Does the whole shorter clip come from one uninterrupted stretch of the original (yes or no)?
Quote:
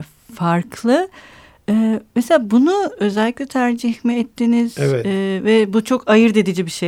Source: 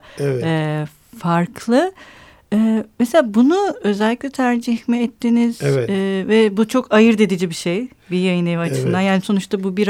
yes